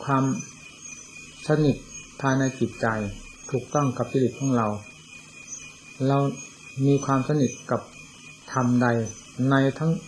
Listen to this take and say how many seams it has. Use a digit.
1